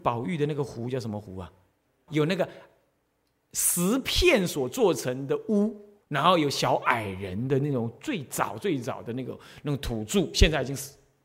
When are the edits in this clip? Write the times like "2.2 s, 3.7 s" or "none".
2.1 s, 6.0 s

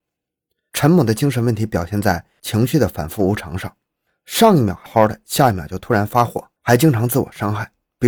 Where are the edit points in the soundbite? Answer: 4.9 s, 6.6 s

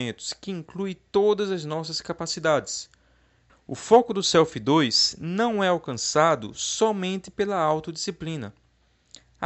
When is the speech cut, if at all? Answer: 3.5 s

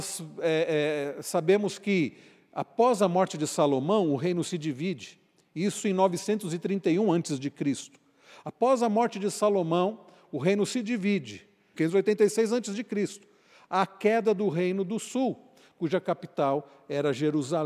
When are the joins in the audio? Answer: 11.7 s

